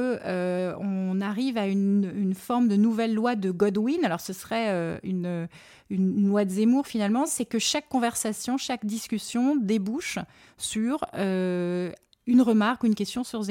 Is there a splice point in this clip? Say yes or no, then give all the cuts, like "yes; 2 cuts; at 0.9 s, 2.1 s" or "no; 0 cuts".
no; 0 cuts